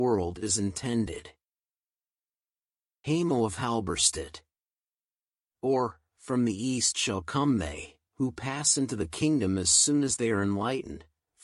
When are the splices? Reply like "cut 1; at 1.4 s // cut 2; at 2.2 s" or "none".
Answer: none